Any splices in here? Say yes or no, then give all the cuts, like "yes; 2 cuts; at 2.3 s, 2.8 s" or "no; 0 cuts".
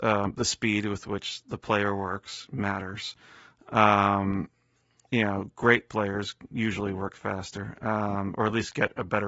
no; 0 cuts